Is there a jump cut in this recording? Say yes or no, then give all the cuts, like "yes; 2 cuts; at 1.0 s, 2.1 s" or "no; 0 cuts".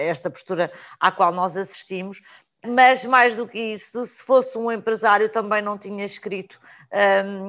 no; 0 cuts